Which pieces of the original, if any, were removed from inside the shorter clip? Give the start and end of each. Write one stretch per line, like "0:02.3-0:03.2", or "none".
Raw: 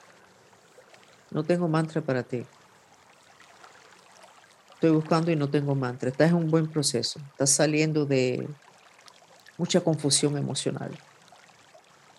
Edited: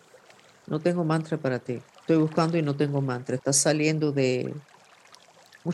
0:02.5-0:04.6
0:06.1-0:07.3

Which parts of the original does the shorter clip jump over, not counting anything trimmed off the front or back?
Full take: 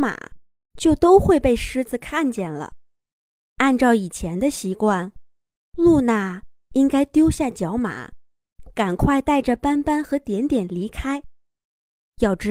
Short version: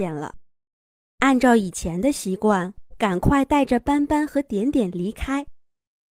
0:05.3-0:08.7

